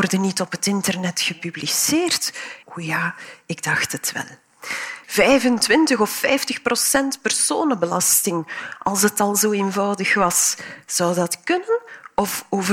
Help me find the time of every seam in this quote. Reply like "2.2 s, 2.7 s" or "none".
2.6 s, 5.0 s